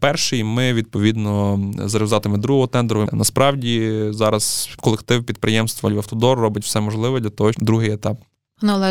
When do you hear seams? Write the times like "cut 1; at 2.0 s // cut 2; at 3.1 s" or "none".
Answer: cut 1; at 3.1 s // cut 2; at 7.5 s